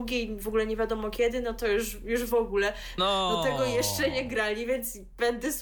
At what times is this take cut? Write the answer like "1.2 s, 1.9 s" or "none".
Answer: 3.0 s